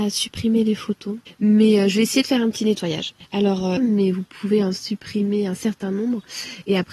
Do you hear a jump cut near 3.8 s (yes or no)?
yes